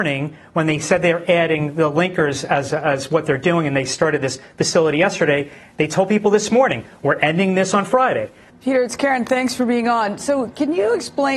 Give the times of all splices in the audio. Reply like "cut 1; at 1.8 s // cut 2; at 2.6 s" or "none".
cut 1; at 8.5 s